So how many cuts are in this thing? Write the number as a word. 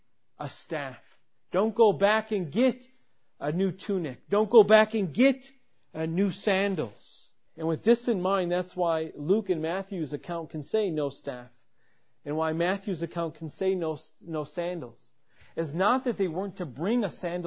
one